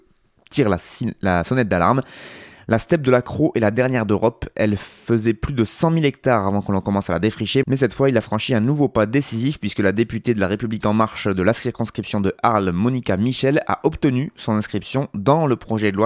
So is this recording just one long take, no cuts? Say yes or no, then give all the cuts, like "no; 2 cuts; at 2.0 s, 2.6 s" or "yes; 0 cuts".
no; 1 cut; at 7.6 s